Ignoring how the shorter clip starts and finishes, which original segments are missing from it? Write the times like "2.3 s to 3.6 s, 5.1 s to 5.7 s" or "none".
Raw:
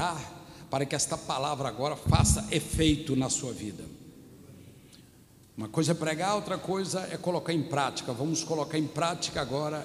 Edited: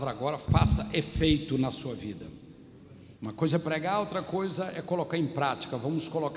4.7 s to 5.5 s